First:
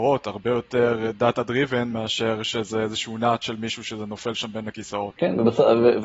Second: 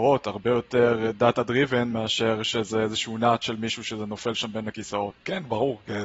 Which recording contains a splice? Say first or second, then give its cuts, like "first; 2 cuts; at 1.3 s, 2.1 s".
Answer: second; 1 cut; at 5.2 s